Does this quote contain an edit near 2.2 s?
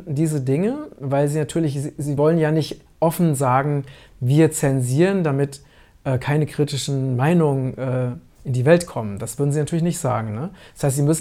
no; 0 cuts

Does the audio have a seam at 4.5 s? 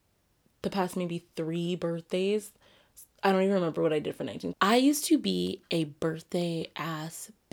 yes; 1 cut; at 4.5 s

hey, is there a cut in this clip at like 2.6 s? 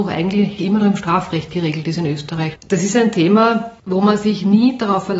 yes; 1 cut; at 2.6 s

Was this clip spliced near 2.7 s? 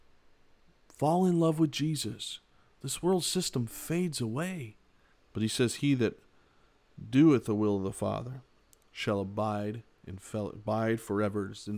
no; 1 cut; at 5.1 s

